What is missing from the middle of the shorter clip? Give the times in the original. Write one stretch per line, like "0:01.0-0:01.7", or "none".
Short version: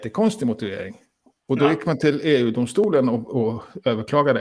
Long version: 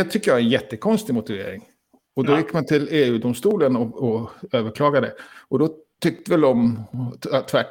none